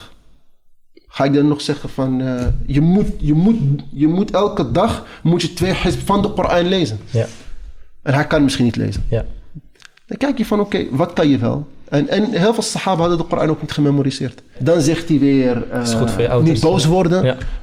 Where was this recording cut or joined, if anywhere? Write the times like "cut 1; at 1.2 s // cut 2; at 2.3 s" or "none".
cut 1; at 14.5 s